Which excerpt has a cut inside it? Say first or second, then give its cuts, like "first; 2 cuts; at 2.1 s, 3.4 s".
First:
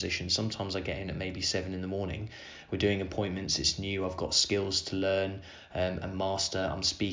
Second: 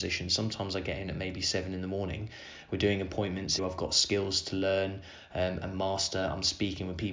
second; 1 cut; at 3.6 s